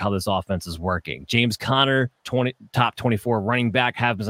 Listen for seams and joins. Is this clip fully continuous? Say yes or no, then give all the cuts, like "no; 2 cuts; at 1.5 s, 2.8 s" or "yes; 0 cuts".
no; 1 cut; at 2.2 s